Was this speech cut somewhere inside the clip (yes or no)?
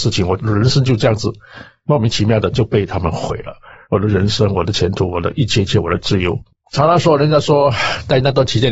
no